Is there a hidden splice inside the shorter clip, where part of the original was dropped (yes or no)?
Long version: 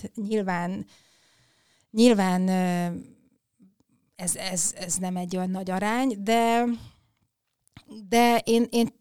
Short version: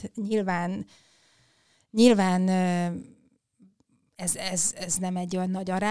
no